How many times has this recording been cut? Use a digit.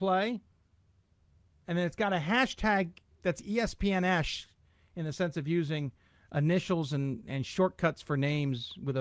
0